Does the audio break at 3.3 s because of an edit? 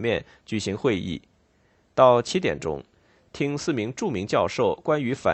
yes; 1 cut; at 3.3 s

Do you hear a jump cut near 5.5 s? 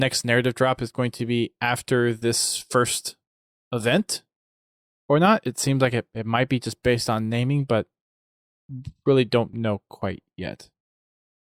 no; 0 cuts

